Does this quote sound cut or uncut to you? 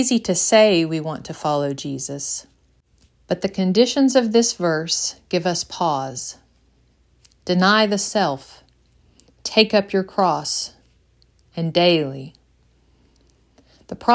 uncut